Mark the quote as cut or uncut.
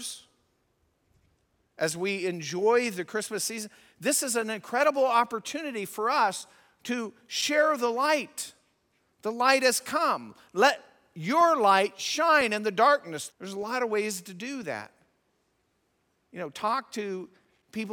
cut